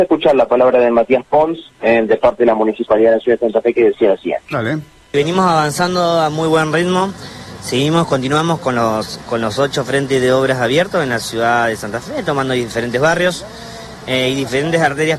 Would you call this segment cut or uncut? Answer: uncut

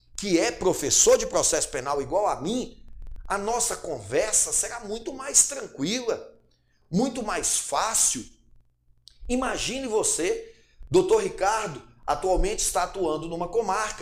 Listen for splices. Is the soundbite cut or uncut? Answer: uncut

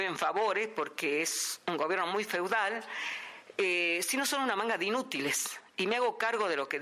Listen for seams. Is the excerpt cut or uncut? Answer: uncut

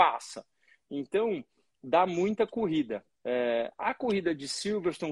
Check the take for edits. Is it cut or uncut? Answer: cut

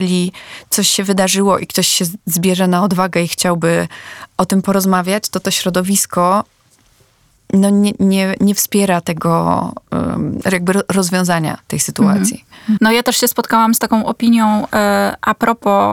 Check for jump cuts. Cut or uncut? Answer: cut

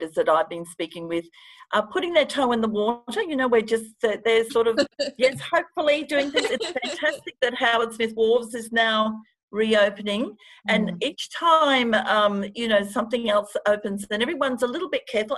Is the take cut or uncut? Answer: uncut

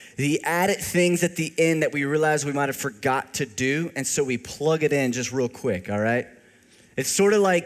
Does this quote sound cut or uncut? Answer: uncut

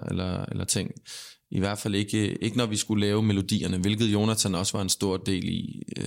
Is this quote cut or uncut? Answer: uncut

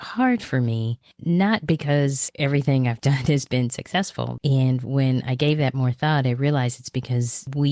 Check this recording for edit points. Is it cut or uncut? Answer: cut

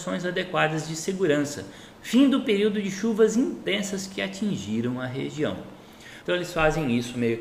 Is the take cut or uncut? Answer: cut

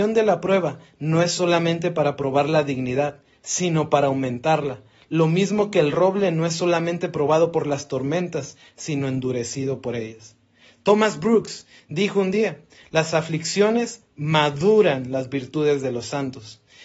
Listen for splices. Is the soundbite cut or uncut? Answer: uncut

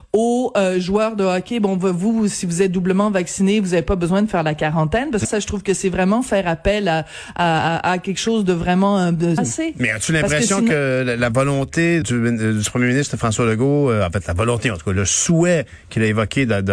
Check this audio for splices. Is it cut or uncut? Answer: cut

